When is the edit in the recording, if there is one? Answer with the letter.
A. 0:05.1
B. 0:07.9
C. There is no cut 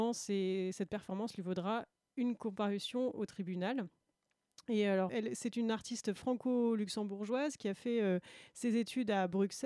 A